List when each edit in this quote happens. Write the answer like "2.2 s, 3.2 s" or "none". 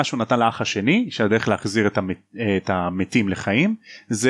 none